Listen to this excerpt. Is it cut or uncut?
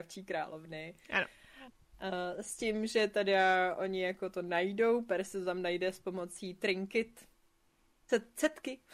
uncut